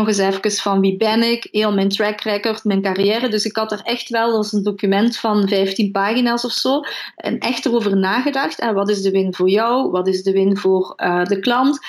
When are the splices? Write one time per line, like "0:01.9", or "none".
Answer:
0:07.1